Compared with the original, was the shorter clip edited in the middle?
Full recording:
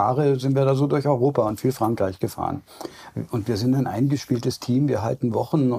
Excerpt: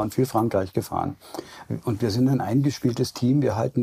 no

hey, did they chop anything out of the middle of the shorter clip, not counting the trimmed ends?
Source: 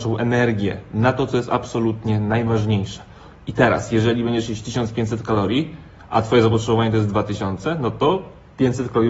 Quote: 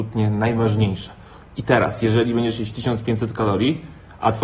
no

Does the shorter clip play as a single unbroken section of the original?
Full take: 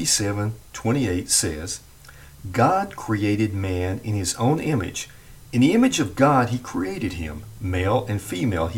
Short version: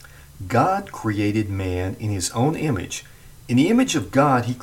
yes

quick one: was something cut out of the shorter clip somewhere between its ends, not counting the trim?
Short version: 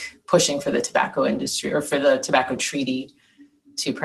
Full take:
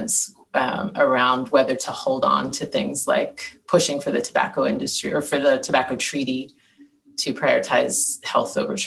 no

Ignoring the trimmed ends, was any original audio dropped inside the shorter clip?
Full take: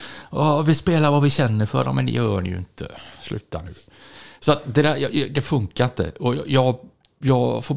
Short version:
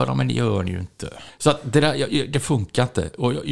yes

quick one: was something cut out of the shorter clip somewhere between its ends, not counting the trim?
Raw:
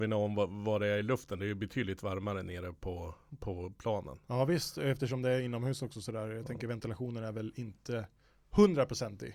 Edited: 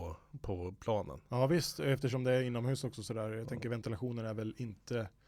no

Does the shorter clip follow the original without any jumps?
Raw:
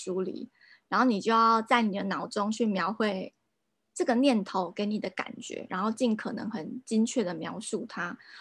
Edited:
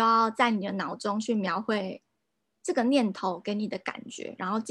yes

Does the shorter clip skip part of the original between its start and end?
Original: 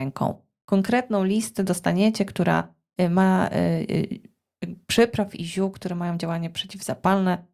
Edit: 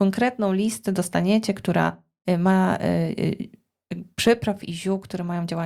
no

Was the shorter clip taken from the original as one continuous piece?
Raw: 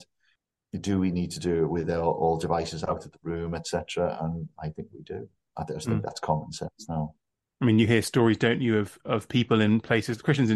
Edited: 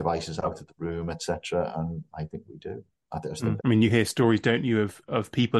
no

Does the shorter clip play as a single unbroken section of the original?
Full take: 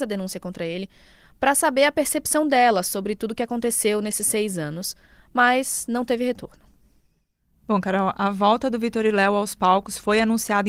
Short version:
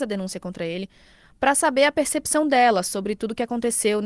yes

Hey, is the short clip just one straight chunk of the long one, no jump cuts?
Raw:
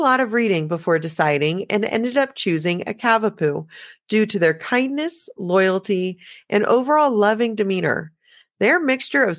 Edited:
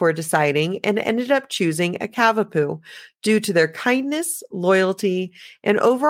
yes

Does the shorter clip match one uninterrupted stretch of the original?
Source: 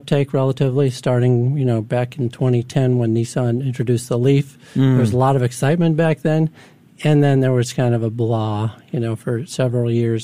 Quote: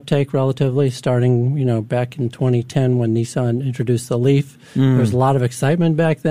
yes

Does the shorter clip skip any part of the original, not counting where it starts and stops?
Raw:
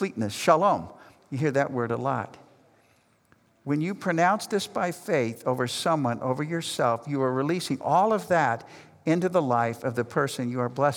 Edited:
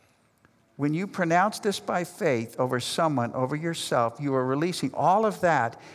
no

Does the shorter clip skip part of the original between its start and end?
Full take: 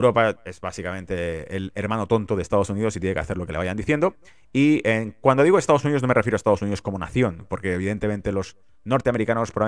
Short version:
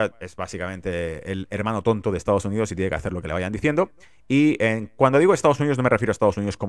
no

